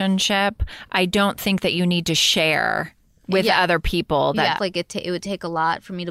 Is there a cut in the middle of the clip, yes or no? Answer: yes